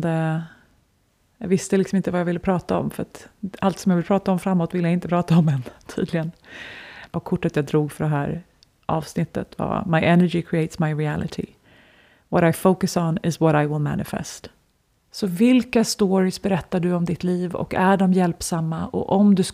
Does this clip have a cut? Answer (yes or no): yes